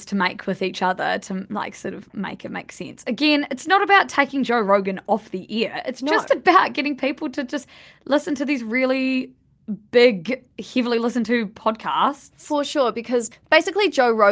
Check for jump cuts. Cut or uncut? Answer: uncut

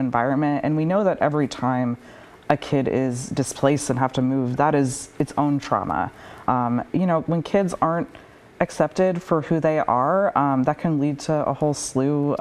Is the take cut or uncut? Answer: cut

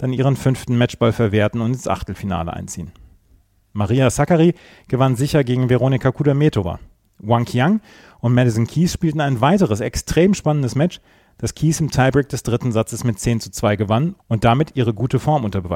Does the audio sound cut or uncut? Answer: uncut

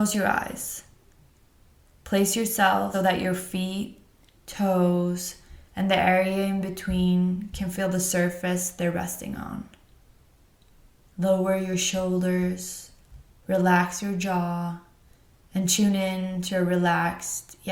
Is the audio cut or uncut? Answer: cut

